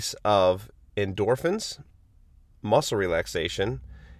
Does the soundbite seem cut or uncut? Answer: uncut